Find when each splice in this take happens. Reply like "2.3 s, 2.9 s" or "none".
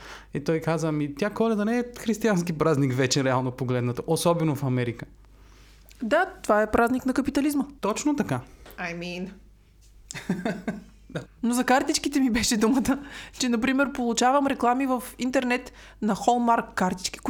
7.8 s, 11.3 s